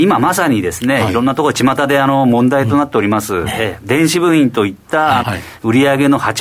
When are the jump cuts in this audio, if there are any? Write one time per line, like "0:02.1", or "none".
0:03.5
0:05.2